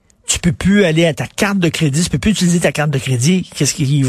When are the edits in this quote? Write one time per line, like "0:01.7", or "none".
none